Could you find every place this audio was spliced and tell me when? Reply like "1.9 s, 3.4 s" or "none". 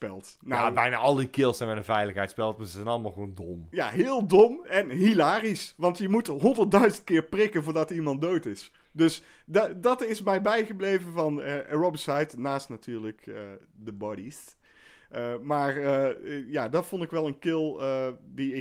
4.6 s